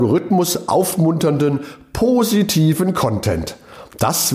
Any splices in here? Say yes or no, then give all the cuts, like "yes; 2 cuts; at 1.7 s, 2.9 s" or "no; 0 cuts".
no; 0 cuts